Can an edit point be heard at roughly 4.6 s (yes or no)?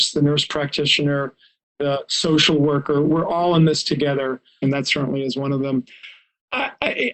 yes